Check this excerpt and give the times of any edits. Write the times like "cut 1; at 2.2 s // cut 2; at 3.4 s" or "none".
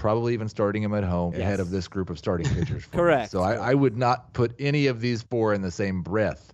cut 1; at 1.3 s